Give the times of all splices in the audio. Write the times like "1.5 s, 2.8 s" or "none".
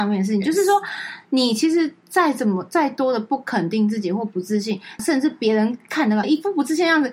5.0 s, 6.2 s